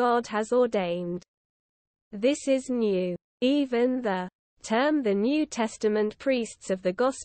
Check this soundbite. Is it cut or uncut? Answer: uncut